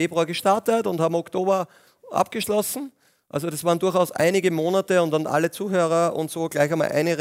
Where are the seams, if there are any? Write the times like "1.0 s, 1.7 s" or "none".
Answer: none